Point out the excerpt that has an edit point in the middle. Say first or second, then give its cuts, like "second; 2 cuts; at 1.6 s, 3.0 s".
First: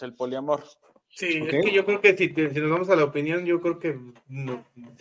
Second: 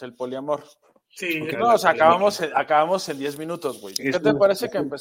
second; 2 cuts; at 1.5 s, 4.0 s